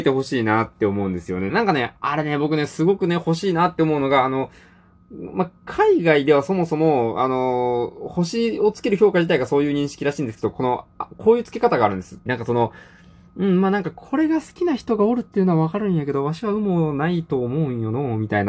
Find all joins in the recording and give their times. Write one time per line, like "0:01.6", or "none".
0:01.5
0:12.3